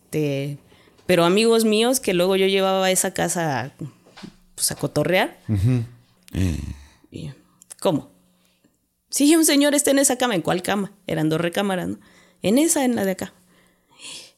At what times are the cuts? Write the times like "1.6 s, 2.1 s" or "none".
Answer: 6.2 s